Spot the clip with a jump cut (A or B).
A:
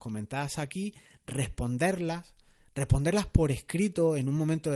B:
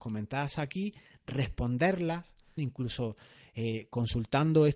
B